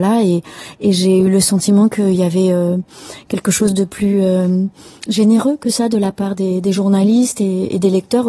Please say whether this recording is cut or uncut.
uncut